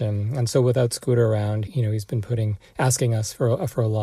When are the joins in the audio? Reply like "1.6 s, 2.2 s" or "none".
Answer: 1.7 s

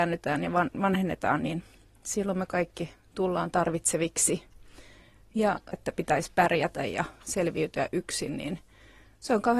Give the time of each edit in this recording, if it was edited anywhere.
5.7 s

